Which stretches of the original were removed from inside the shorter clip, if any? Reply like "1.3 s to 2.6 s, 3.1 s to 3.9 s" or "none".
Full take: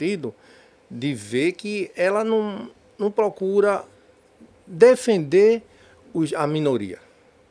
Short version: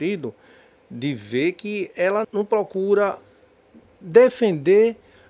2.2 s to 2.9 s